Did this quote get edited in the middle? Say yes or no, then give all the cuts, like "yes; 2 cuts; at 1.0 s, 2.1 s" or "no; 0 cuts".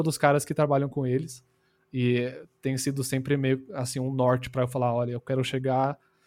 no; 0 cuts